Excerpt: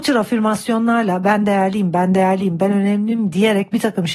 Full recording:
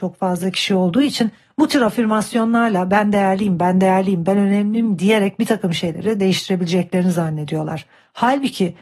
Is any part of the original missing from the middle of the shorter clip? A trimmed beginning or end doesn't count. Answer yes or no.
no